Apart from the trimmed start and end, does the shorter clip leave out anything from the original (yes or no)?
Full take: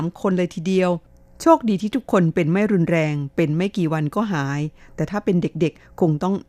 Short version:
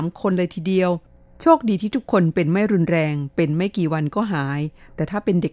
no